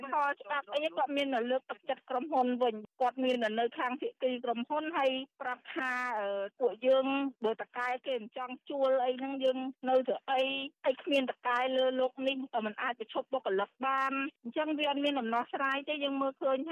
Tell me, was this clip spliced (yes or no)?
no